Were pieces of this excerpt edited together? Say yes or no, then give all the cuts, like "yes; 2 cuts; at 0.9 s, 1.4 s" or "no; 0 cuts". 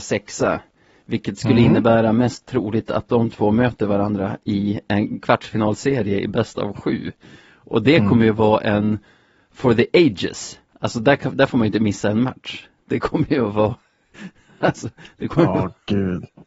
no; 0 cuts